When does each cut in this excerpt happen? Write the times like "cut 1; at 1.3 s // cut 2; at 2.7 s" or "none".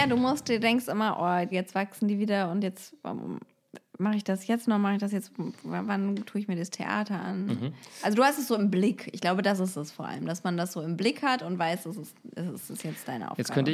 cut 1; at 1.5 s